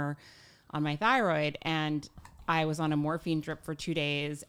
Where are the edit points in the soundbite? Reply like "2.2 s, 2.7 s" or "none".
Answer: none